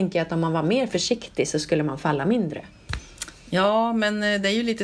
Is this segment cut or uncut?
uncut